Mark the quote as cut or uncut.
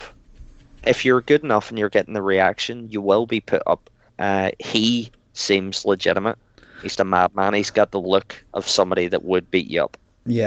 cut